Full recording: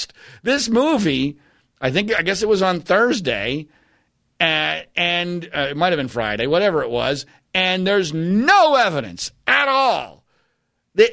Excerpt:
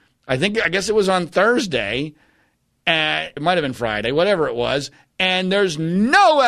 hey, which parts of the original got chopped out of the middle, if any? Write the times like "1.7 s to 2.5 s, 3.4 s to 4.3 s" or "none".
4.9 s to 5.7 s